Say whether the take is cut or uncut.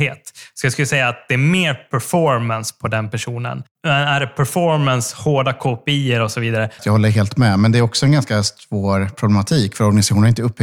cut